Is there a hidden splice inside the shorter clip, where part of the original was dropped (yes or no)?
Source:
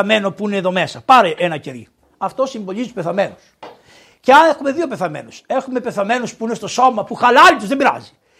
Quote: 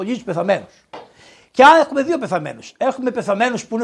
no